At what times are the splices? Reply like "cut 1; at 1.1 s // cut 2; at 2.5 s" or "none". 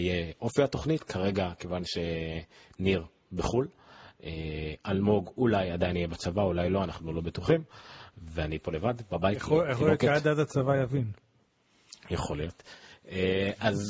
none